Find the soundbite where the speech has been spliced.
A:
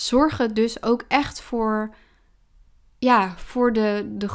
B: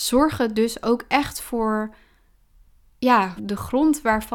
B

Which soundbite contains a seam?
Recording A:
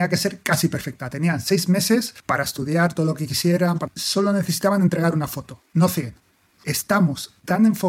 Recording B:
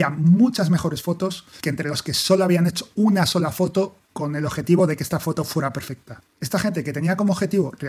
A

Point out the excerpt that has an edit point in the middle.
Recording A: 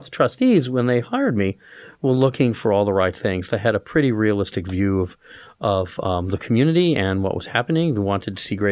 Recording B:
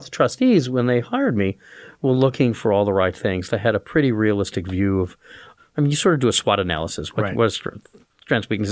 B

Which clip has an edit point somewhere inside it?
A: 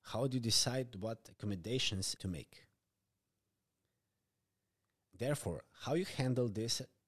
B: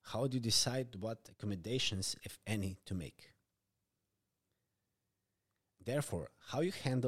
A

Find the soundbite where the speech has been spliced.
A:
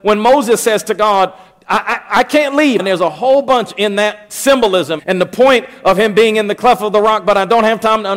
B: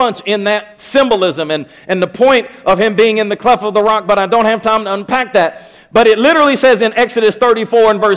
A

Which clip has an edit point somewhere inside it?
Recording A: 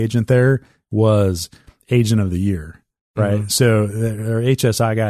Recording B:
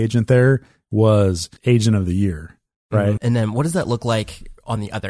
B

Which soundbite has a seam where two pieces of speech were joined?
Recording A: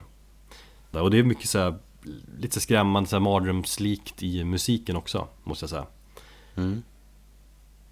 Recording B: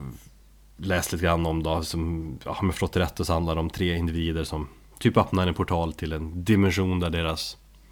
A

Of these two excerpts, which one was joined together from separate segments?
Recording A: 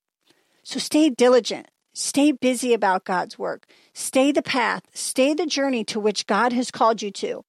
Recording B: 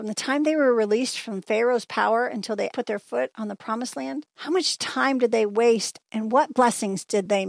B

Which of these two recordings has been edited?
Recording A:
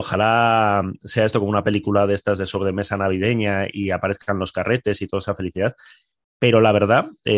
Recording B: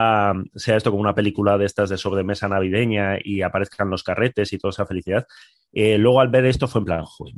B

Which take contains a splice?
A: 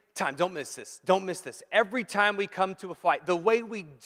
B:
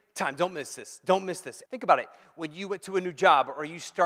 B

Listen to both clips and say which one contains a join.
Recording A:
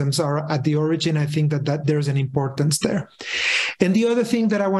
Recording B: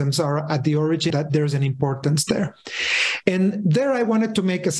B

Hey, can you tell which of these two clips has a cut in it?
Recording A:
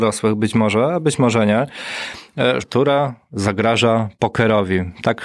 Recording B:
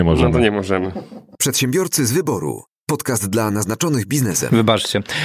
A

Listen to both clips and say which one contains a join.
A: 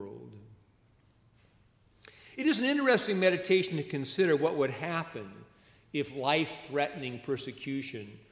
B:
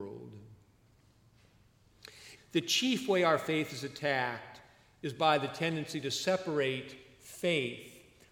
B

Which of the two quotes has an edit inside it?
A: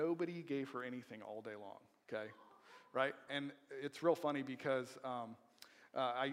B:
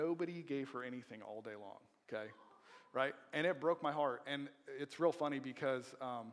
A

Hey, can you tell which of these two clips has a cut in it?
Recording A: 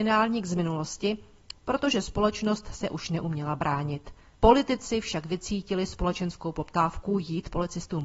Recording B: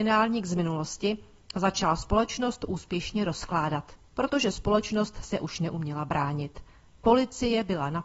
A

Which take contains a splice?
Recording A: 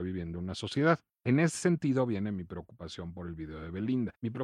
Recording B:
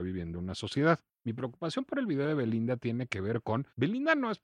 B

